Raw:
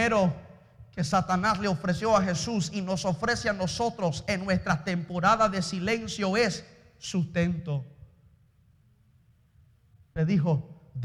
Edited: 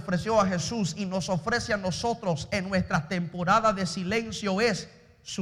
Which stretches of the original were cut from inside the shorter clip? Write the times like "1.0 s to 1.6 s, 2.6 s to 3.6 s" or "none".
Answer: none